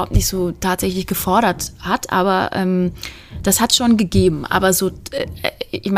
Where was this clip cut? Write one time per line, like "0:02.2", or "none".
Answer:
none